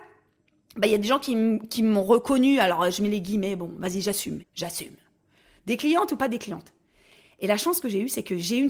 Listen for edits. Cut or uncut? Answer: cut